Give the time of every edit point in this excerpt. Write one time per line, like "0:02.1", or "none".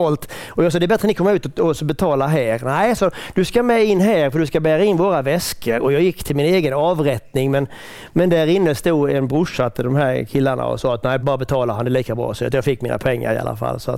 0:11.2